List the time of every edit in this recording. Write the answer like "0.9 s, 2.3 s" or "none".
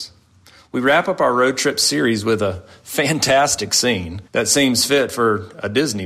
4.3 s